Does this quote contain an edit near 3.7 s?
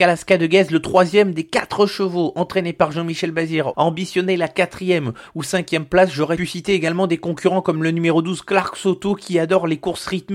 yes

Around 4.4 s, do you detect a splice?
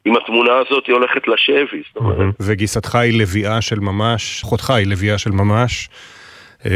yes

